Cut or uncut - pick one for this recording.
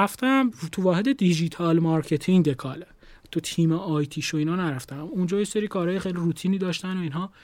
uncut